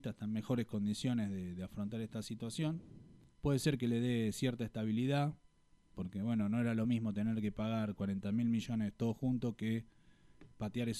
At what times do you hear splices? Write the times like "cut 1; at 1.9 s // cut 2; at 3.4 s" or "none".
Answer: none